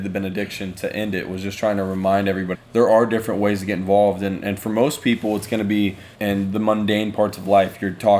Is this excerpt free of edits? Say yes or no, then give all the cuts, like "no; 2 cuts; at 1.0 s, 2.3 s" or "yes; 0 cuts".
no; 2 cuts; at 2.5 s, 6.1 s